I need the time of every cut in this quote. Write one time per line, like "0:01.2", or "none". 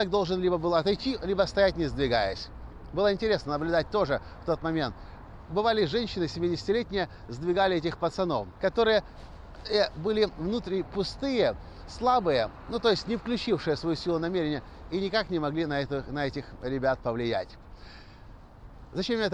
0:08.6